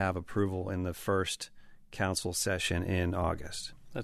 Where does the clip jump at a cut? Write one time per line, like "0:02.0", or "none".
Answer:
none